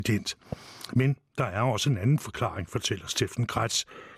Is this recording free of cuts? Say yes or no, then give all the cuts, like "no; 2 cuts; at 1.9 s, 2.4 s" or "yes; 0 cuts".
yes; 0 cuts